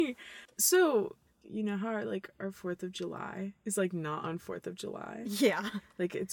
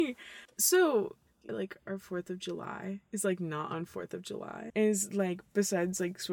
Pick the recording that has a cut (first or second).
second